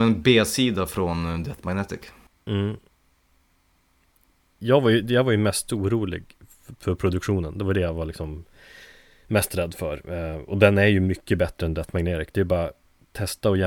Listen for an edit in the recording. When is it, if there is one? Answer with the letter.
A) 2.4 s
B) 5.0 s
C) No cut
C